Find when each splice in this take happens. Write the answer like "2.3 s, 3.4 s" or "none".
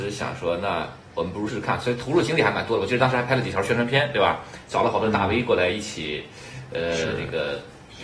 1.5 s